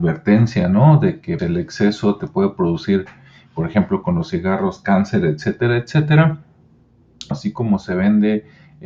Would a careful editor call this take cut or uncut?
cut